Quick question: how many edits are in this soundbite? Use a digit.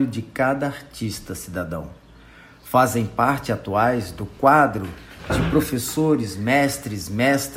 0